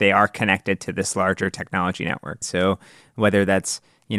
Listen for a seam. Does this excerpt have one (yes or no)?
yes